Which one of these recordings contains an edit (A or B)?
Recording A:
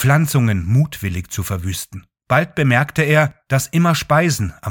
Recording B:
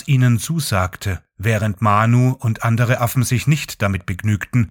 A